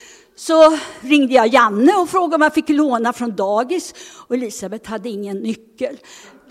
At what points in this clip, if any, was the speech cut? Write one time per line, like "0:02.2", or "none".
none